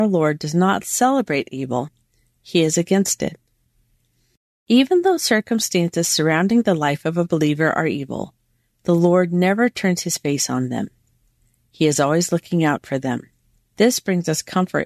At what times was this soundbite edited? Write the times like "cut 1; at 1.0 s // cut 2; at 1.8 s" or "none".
cut 1; at 13.6 s